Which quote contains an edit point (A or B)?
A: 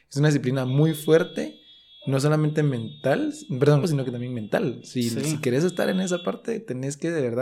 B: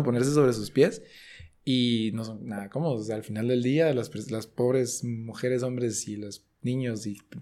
A